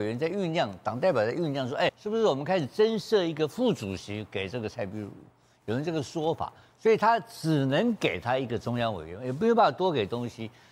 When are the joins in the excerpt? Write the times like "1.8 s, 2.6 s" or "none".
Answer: 1.9 s